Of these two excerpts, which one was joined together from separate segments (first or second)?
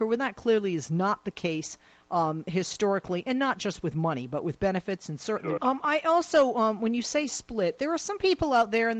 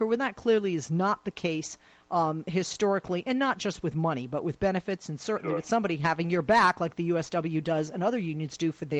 first